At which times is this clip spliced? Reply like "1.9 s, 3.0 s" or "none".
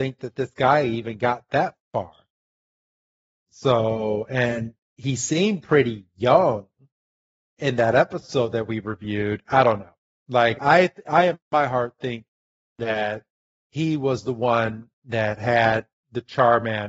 10.6 s